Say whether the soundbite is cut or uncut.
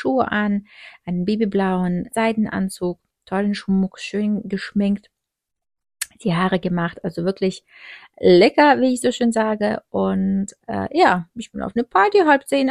cut